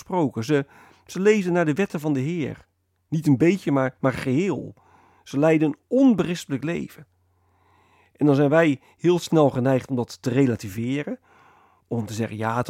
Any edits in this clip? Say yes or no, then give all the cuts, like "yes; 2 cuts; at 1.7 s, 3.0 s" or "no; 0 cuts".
no; 0 cuts